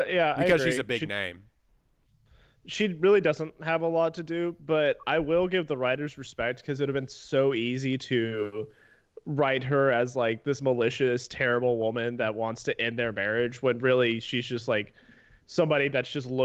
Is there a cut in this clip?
no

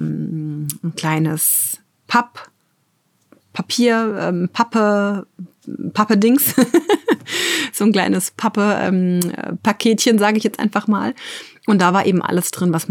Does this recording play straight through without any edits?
yes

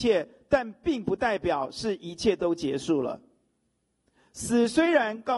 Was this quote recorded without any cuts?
yes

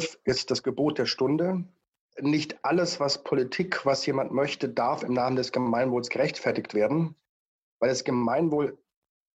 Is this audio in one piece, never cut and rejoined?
yes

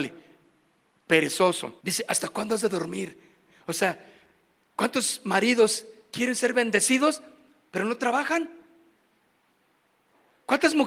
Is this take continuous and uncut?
no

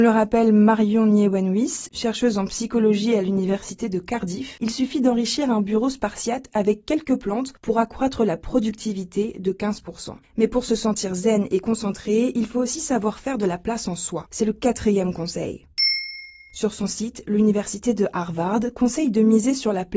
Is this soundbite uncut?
yes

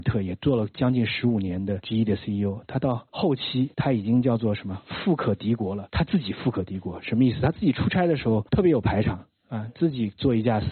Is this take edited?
no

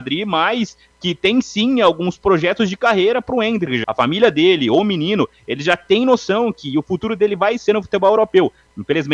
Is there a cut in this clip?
yes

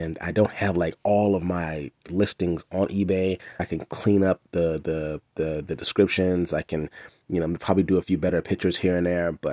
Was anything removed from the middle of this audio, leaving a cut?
yes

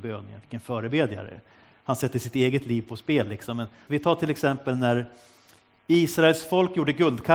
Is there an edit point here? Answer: yes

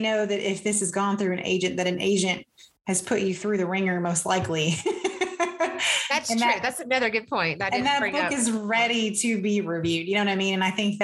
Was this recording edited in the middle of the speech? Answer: no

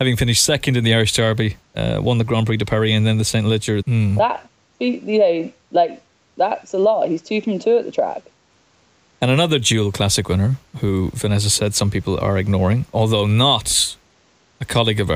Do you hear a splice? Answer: yes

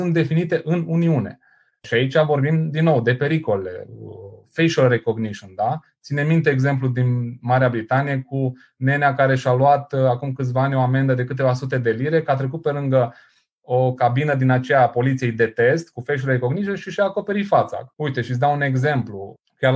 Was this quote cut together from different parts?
yes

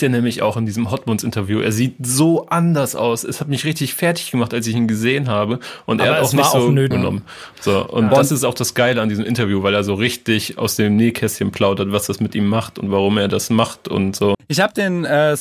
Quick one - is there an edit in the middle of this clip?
yes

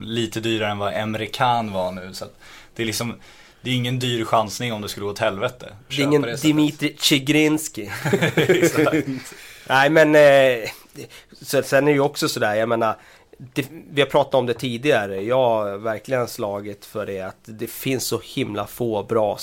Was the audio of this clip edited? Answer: yes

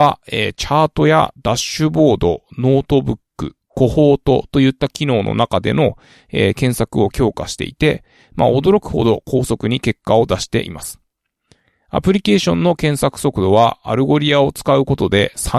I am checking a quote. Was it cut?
no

